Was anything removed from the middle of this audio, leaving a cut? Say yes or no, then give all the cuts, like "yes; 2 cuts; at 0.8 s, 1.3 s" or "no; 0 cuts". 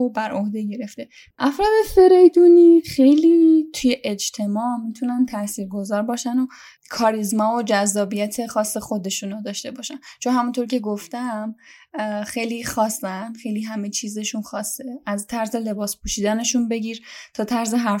yes; 1 cut; at 1.3 s